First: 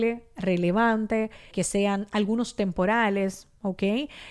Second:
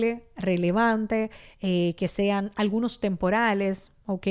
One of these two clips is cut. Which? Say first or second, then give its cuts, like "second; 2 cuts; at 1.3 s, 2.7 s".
first; 1 cut; at 1.5 s